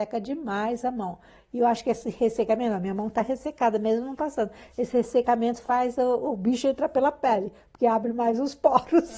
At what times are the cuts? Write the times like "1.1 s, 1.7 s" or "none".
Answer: none